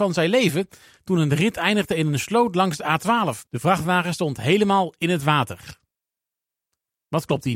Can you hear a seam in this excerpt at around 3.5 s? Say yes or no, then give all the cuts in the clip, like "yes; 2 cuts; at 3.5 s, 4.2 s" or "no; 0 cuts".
yes; 1 cut; at 3.5 s